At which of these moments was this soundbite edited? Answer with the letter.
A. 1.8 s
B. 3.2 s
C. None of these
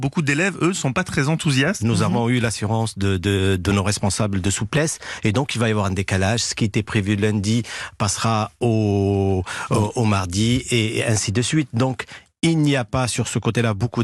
A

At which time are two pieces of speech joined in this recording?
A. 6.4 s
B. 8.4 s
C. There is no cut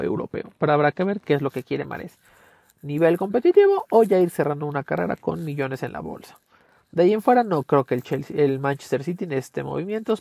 C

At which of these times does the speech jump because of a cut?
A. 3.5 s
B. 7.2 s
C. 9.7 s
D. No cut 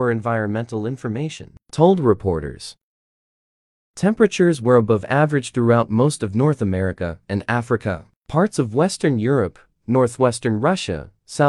B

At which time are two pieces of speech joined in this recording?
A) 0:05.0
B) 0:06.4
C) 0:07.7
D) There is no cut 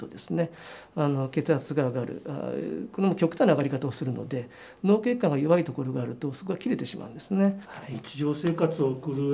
C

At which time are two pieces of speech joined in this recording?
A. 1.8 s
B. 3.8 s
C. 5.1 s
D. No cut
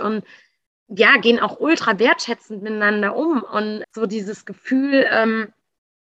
B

